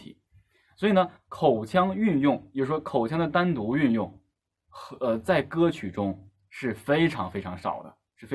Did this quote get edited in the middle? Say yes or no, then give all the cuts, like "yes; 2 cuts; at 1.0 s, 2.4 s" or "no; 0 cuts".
no; 0 cuts